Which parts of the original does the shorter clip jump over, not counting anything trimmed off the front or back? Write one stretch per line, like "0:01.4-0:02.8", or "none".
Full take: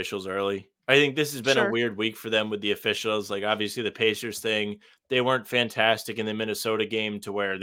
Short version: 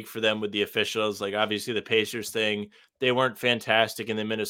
none